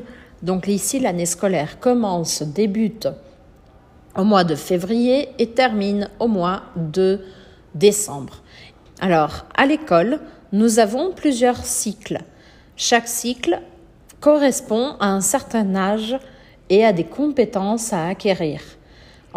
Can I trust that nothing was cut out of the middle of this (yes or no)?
no